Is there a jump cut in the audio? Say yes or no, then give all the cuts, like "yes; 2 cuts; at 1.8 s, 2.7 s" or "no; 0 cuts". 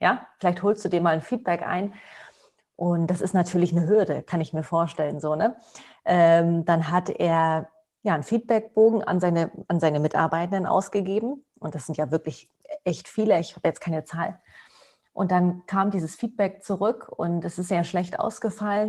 no; 0 cuts